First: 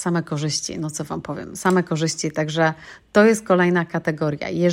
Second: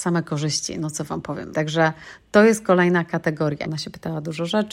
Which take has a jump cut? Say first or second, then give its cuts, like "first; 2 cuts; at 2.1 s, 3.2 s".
second; 2 cuts; at 1.5 s, 3.6 s